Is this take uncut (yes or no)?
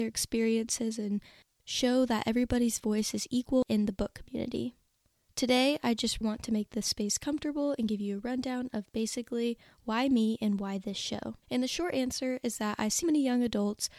no